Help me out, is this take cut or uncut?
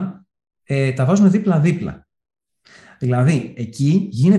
uncut